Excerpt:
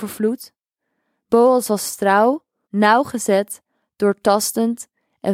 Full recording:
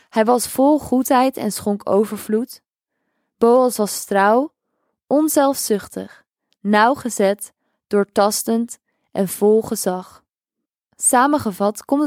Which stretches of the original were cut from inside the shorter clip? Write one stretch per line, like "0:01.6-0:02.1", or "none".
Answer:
0:04.7-0:06.5